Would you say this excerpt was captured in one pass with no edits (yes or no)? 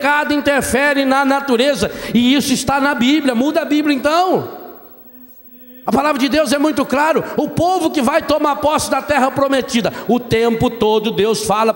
yes